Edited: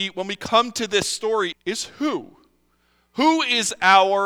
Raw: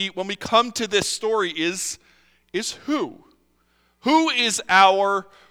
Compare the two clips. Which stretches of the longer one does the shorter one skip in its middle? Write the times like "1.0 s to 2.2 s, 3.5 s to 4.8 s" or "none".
1.5 s to 2.4 s